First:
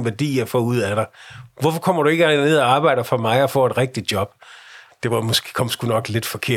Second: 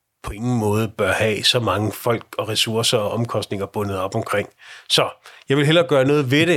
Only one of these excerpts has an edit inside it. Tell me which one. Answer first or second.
first